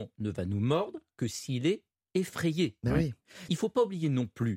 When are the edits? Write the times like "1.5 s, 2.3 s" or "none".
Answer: 3.5 s